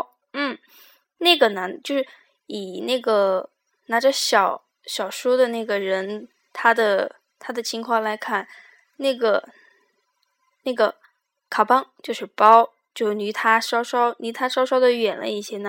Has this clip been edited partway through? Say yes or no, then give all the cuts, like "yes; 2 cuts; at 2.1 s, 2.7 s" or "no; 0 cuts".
no; 0 cuts